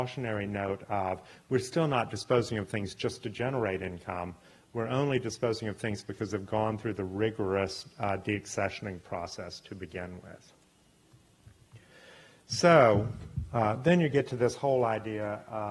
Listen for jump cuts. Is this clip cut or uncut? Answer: uncut